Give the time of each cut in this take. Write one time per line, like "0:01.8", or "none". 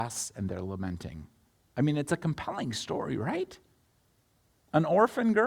0:01.5